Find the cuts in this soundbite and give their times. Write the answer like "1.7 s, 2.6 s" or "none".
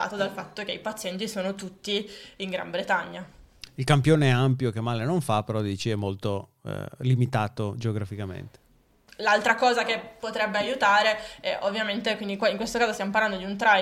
9.1 s